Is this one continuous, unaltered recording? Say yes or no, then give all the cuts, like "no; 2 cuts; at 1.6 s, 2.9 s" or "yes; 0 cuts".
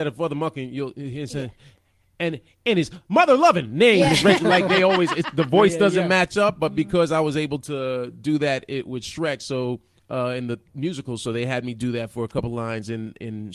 yes; 0 cuts